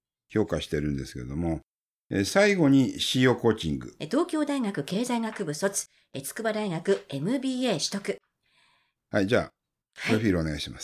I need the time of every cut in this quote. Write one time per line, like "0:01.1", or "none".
0:04.0
0:08.9